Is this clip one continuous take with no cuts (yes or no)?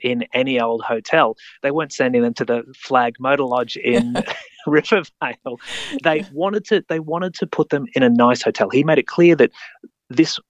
yes